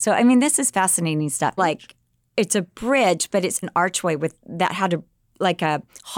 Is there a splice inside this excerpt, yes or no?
yes